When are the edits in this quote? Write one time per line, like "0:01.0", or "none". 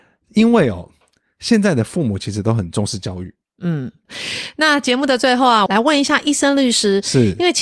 0:04.1
0:05.7